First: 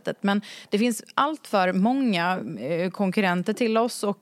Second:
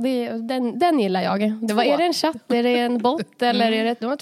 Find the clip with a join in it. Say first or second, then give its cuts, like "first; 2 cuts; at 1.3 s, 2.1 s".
second; 1 cut; at 1.7 s